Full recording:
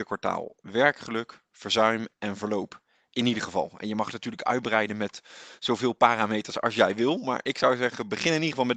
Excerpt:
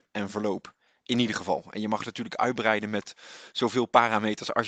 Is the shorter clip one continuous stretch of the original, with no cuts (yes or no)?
yes